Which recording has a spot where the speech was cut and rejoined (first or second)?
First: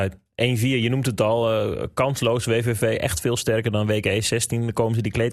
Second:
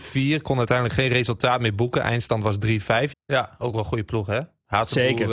second